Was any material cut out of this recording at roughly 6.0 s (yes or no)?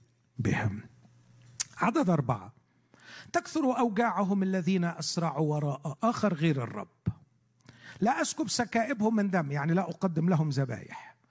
yes